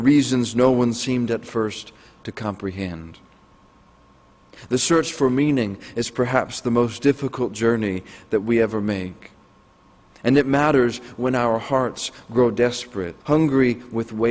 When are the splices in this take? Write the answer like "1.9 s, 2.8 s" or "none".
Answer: 13.2 s